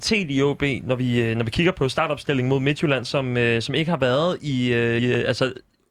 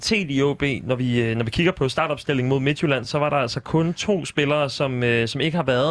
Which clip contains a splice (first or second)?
first